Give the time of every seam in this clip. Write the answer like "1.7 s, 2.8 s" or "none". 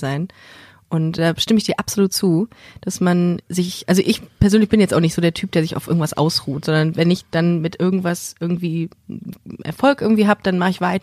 1.2 s